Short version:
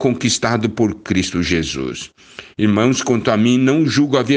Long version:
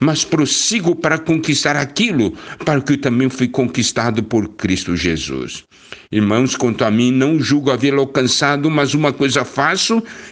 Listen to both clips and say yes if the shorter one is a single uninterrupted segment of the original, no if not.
yes